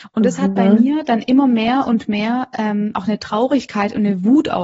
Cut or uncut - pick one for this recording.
uncut